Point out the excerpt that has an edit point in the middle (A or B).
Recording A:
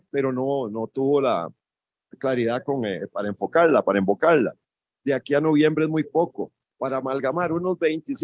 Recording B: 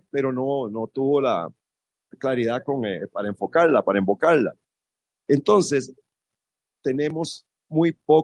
A